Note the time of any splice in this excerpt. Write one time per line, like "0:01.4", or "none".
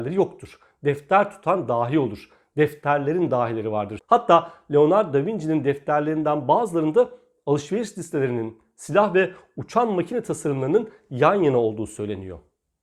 0:04.0